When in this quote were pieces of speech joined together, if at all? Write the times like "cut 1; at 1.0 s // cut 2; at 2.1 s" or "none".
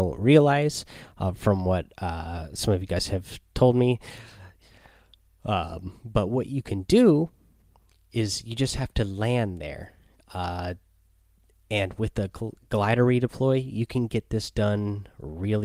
none